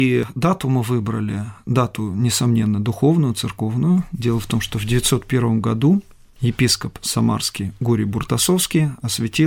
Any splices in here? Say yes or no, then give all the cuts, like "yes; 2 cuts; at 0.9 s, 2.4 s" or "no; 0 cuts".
no; 0 cuts